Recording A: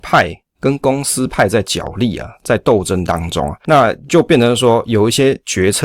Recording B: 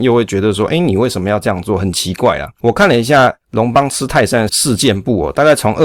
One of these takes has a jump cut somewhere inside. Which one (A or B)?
B